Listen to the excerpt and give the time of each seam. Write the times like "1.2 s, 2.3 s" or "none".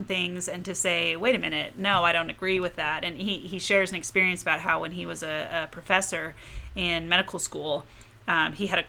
none